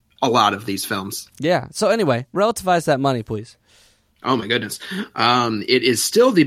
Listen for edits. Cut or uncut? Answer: uncut